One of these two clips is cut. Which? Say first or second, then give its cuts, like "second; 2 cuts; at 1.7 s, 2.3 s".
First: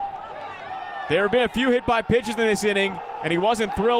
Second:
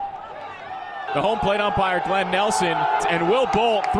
second; 2 cuts; at 1.1 s, 3.0 s